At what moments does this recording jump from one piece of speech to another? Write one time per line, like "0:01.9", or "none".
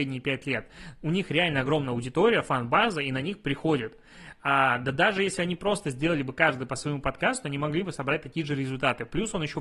none